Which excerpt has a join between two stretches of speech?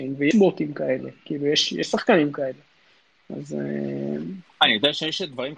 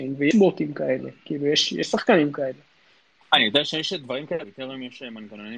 second; 2 cuts; at 3.2 s, 4.4 s

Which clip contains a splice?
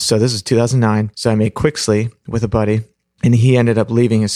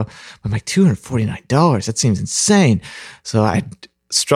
first; 1 cut; at 1.1 s

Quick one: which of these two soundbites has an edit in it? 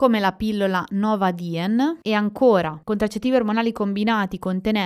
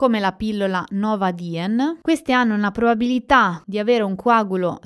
first; 1 cut; at 2.0 s

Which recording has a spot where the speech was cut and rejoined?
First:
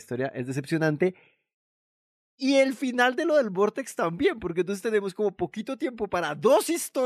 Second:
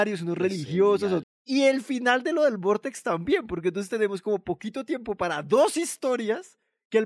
second; 1 cut; at 1.2 s

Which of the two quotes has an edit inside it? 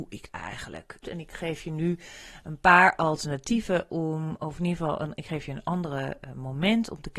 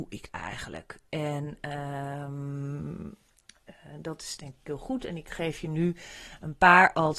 first; 1 cut; at 1.0 s

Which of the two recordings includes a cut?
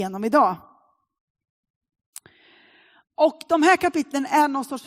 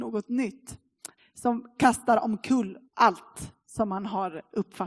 second; 2 cuts; at 1.2 s, 2.9 s

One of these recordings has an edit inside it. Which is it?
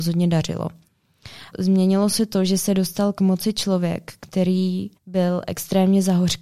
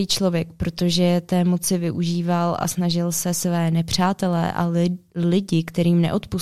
first; 2 cuts; at 1.5 s, 5.0 s

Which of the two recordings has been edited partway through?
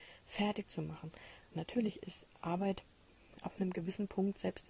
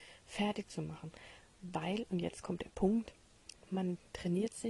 first; 1 cut; at 1.5 s

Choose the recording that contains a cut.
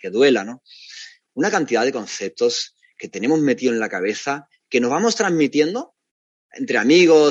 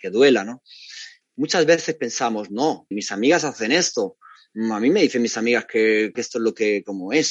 second; 3 cuts; at 1.2 s, 2.9 s, 6.1 s

